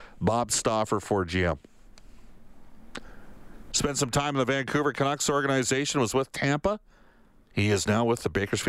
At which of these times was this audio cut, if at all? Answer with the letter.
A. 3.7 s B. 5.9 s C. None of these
A